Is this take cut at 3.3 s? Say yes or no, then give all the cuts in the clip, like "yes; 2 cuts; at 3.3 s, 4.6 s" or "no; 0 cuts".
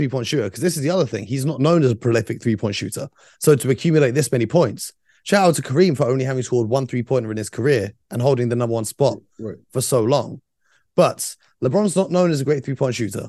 no; 0 cuts